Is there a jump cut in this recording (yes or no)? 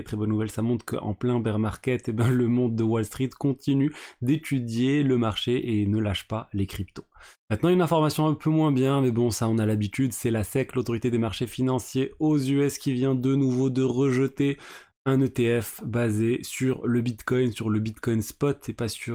yes